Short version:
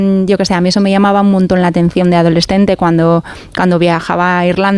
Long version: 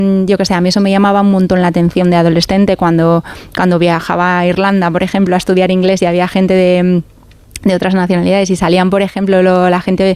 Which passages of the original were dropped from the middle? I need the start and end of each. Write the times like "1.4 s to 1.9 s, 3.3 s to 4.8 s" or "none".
none